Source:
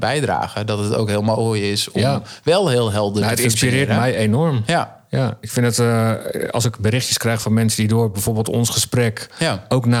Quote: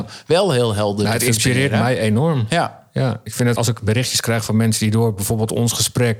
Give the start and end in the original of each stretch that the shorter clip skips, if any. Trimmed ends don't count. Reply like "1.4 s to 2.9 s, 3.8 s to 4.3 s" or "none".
5.7 s to 6.5 s